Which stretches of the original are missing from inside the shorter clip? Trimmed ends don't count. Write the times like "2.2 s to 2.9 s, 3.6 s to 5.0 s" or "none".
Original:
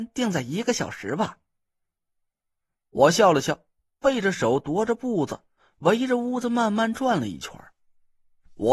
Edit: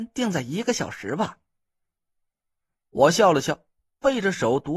none